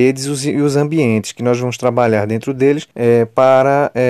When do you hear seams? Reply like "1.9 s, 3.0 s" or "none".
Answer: 2.9 s